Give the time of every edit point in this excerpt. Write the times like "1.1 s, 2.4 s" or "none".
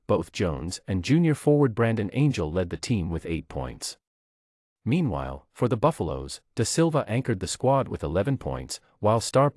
none